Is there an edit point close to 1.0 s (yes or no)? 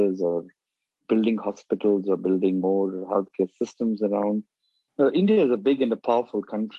no